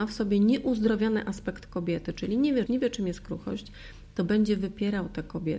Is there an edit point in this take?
yes; 1 cut; at 2.7 s

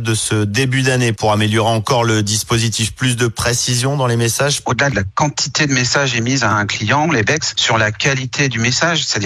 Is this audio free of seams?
no; 2 cuts; at 4.6 s, 7.0 s

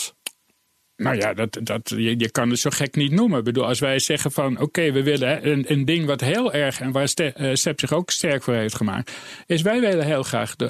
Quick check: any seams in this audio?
no; 0 cuts

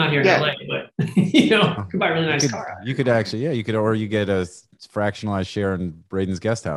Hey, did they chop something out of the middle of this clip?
no; 0 cuts

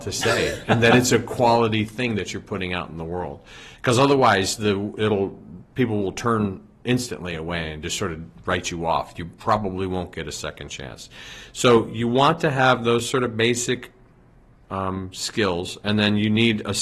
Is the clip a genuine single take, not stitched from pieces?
yes; 0 cuts

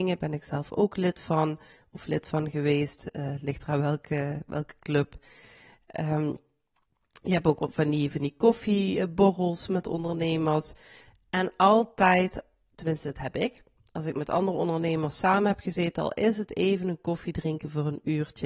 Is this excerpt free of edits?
yes; 0 cuts

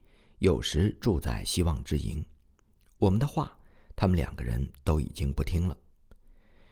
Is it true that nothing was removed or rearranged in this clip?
yes; 0 cuts

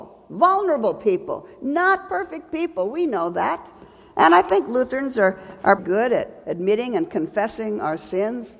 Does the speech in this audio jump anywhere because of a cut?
yes; 1 cut; at 5.8 s

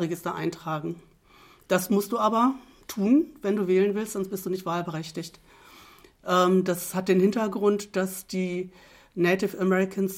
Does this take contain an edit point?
no; 0 cuts

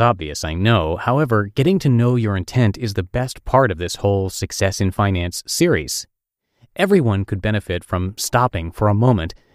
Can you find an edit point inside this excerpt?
no; 0 cuts

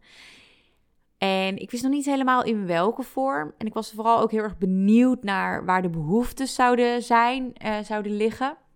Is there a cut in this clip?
no; 0 cuts

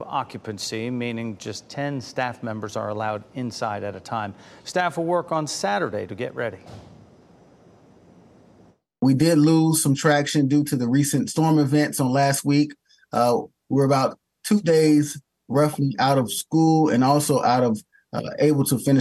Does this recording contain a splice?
no; 0 cuts

